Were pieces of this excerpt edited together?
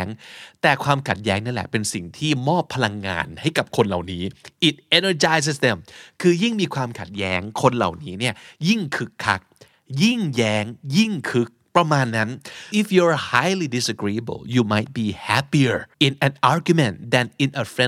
yes; 2 cuts; at 12.7 s, 15.9 s

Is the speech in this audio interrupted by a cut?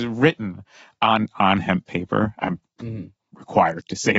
no; 0 cuts

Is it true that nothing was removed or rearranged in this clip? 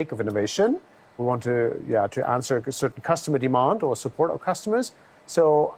no; 1 cut; at 1.2 s

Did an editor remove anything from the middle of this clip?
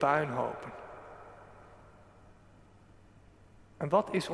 no; 0 cuts

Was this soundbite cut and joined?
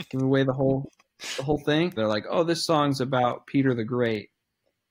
yes; 1 cut; at 2.0 s

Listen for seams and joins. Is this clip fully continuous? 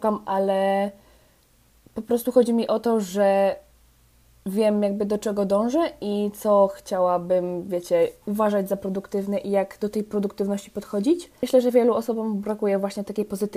yes; 0 cuts

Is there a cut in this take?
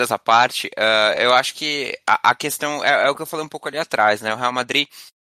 no; 0 cuts

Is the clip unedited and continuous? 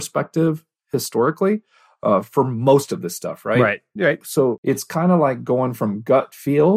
yes; 0 cuts

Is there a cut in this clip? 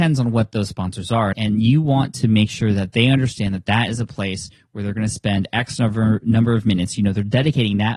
yes; 1 cut; at 1.3 s

